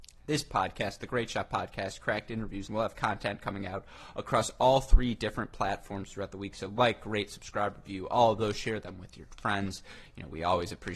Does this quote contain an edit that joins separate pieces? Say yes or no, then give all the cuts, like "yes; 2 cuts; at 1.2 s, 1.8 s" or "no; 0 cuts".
yes; 1 cut; at 2.7 s